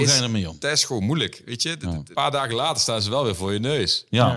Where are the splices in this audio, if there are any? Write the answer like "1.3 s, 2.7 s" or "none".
2.1 s